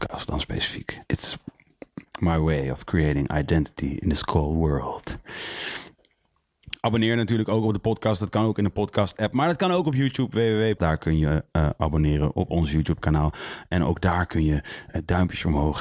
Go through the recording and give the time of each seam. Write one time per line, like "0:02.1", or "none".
0:01.1
0:10.8